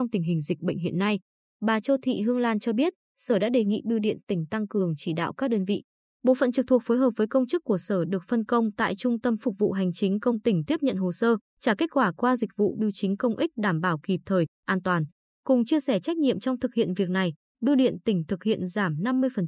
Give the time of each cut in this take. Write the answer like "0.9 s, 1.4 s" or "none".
15.2 s, 17.5 s